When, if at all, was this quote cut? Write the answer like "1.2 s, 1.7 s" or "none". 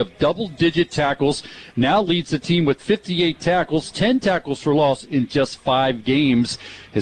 none